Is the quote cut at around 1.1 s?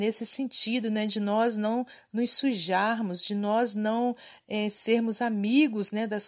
no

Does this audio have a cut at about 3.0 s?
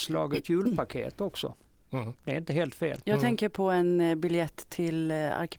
yes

